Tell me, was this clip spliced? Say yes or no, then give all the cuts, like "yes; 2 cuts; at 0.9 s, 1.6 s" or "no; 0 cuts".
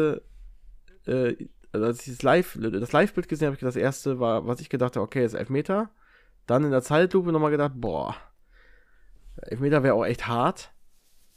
no; 0 cuts